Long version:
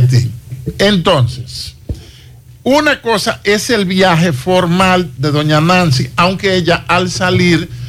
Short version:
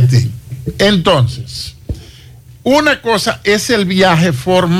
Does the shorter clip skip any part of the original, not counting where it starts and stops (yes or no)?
no